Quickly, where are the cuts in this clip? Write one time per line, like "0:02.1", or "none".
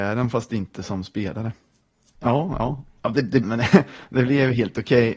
0:02.1
0:03.4

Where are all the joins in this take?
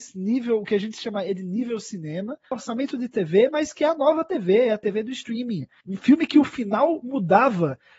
0:02.5
0:05.8

